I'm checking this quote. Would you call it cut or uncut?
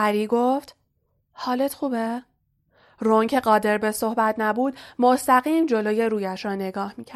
uncut